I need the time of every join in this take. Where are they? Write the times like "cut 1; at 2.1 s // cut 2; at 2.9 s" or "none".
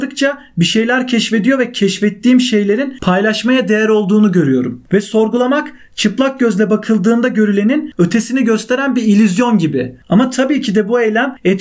none